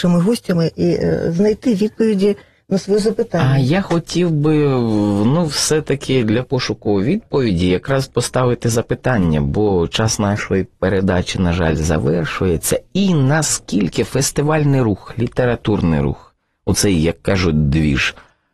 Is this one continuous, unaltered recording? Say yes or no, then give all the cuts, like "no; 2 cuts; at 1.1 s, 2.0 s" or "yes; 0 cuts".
yes; 0 cuts